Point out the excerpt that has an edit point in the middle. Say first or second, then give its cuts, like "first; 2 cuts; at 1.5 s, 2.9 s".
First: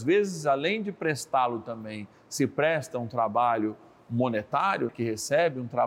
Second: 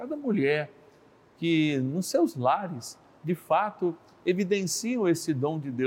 first; 1 cut; at 4.9 s